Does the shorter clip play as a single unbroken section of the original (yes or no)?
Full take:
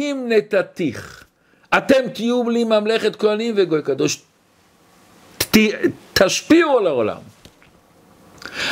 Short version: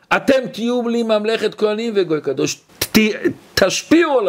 no